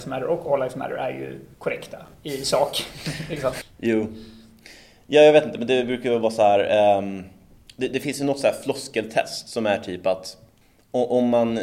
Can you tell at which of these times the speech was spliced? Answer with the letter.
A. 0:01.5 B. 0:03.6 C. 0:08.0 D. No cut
A